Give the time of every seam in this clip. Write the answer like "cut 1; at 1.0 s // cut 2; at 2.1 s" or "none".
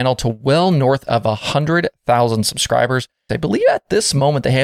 cut 1; at 3.3 s